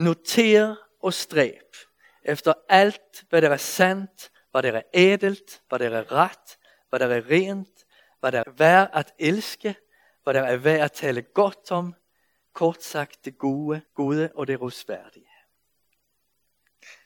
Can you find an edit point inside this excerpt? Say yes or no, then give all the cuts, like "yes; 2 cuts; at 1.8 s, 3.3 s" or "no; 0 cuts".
yes; 2 cuts; at 8.4 s, 13.9 s